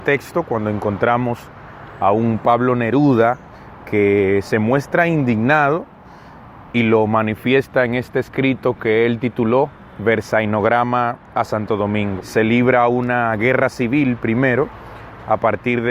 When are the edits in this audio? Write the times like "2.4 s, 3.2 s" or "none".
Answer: 9.9 s, 12.2 s